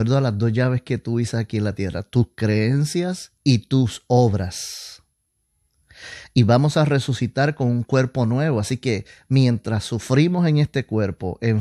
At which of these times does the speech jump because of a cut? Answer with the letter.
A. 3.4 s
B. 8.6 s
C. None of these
A